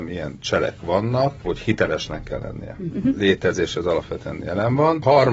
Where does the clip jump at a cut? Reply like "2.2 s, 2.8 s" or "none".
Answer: 1.4 s, 2.9 s